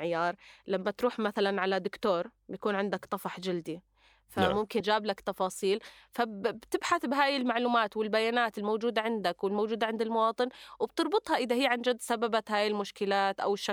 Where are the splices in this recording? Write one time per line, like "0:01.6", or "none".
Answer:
0:04.8